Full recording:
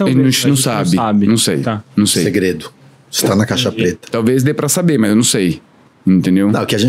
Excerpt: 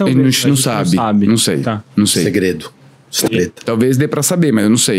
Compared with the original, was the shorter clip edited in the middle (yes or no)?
yes